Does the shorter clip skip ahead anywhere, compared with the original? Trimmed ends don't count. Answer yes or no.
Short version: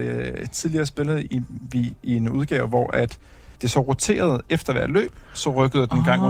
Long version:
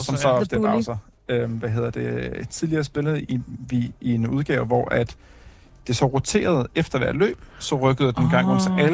yes